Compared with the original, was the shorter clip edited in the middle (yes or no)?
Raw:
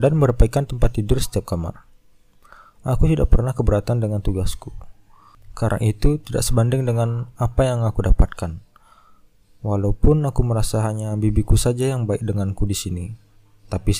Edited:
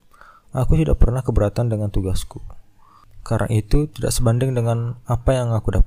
no